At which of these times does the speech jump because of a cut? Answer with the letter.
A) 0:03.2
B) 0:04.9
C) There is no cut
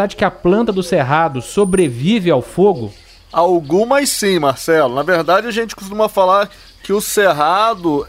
C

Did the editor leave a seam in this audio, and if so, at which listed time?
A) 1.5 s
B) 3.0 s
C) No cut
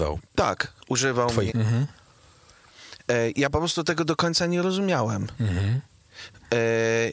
A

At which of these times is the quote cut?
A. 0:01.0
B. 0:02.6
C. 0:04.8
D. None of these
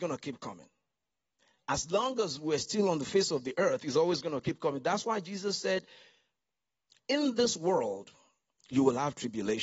D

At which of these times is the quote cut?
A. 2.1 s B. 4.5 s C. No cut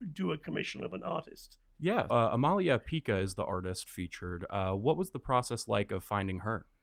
A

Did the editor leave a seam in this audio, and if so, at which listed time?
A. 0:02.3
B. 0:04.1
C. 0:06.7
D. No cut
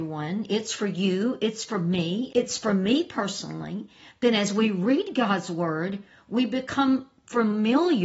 A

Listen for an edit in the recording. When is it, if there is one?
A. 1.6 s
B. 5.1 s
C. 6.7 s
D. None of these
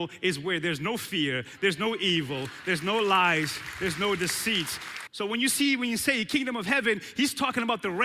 B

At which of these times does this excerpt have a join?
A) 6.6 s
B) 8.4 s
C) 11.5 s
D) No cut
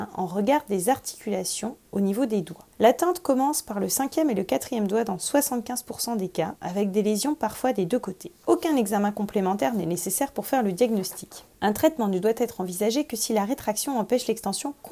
A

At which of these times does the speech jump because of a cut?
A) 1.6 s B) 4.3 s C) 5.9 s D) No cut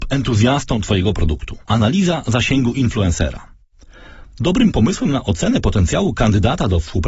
A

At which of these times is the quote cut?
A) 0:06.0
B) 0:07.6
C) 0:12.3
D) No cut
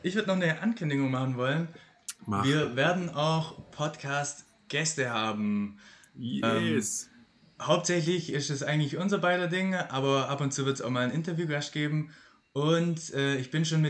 D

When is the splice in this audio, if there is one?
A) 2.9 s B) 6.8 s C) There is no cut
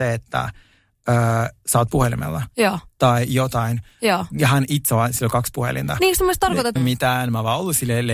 B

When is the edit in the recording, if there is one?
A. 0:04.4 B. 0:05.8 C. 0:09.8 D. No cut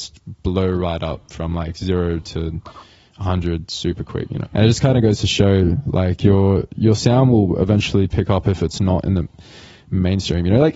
A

